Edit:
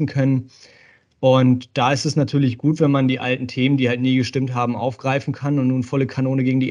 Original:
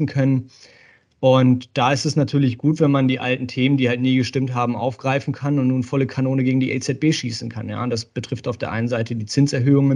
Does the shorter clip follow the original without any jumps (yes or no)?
yes